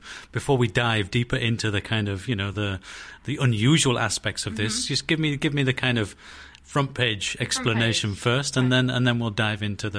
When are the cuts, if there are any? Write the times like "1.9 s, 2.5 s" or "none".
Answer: none